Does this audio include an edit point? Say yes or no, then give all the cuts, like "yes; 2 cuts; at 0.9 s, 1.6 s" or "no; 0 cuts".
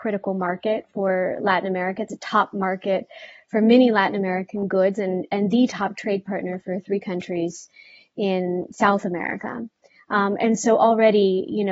no; 0 cuts